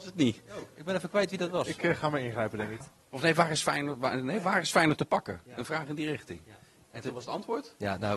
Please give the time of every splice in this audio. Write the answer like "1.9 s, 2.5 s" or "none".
2.8 s